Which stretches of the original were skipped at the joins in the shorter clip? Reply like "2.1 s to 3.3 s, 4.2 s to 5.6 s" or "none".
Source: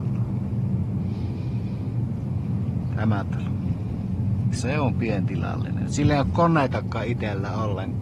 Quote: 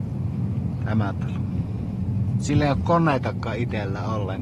4.5 s to 5.9 s